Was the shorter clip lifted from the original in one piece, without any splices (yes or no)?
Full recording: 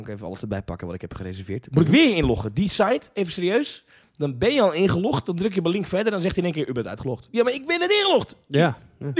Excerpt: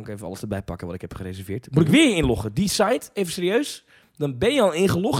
yes